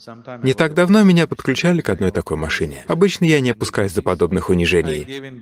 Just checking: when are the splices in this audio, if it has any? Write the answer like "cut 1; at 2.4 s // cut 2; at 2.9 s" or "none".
none